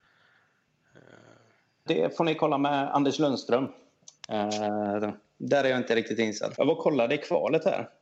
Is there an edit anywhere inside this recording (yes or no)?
yes